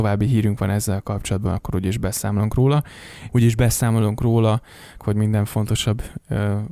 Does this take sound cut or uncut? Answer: cut